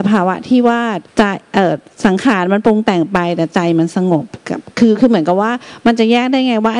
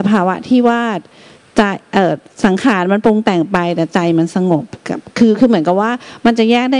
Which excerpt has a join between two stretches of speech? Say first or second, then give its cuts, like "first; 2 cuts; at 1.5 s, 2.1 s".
first; 1 cut; at 1.1 s